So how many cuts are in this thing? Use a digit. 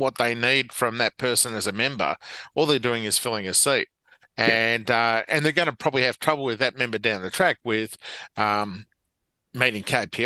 0